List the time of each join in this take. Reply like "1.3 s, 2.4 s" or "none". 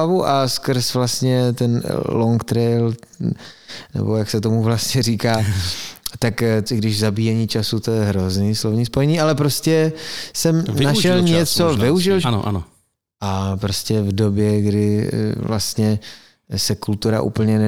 6.7 s, 12.2 s